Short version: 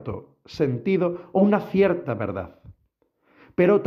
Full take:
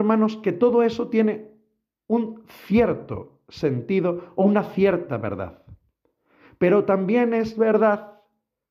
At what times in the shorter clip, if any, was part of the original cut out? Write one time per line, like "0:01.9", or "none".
none